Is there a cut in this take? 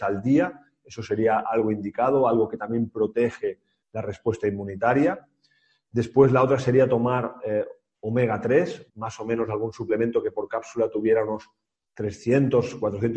yes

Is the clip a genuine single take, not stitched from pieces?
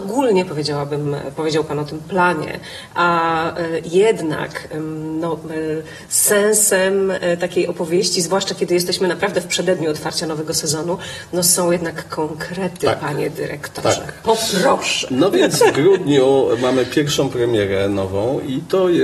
yes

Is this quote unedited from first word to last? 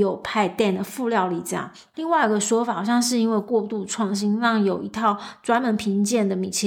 no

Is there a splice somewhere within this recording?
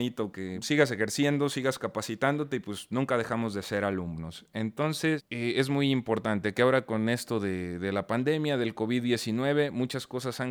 no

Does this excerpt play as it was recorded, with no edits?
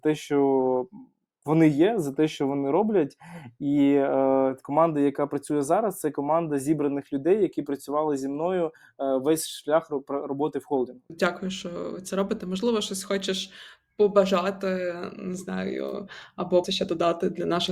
no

